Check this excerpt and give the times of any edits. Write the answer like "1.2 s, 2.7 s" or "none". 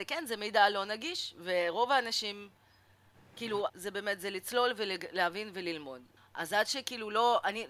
3.7 s, 6.2 s